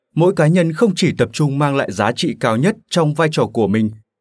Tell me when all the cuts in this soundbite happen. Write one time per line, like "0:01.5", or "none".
none